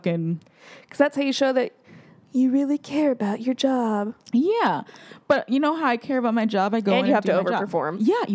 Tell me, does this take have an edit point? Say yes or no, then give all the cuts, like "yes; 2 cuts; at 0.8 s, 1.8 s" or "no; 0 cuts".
no; 0 cuts